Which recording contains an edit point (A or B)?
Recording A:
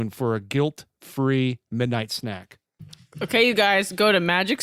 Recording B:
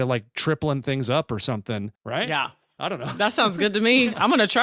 B